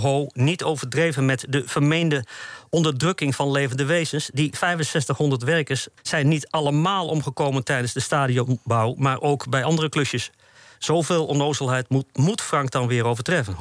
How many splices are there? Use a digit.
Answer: 1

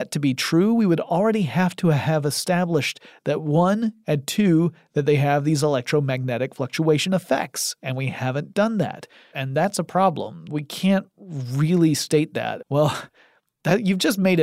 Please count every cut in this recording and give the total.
3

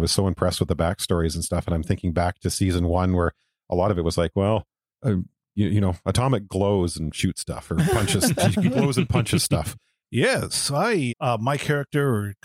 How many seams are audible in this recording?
2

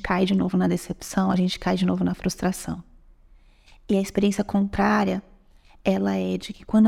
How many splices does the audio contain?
0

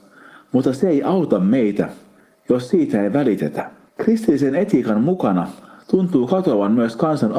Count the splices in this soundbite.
0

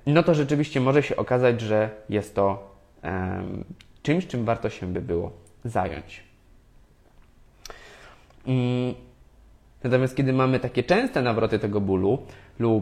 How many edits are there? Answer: 1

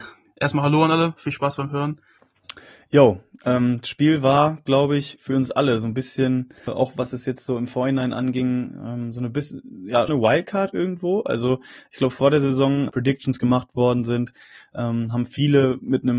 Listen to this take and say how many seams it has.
3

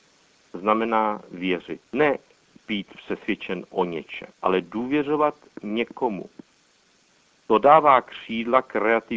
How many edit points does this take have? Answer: 2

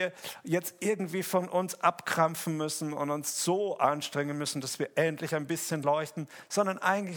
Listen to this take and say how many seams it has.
0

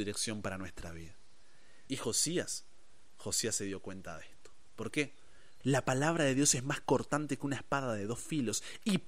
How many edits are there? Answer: 2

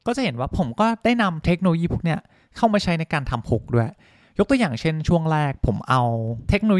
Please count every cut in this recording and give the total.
0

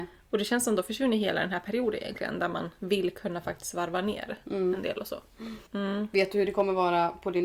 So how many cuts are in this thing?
1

